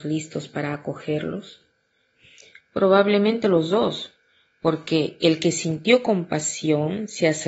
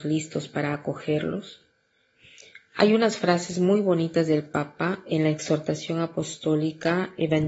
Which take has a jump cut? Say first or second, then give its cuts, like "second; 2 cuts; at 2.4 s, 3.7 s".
first; 1 cut; at 2.6 s